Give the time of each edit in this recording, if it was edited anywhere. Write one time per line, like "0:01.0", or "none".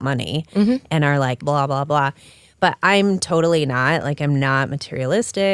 0:01.4